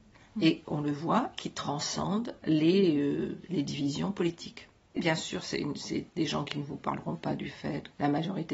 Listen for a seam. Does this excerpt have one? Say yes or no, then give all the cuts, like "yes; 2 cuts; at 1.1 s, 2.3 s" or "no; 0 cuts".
yes; 1 cut; at 5.0 s